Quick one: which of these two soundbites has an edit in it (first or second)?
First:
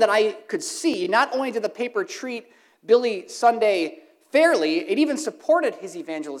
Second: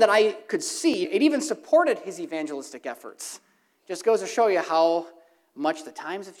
second